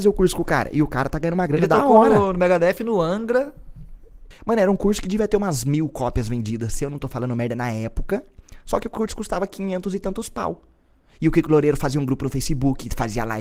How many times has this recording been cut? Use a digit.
1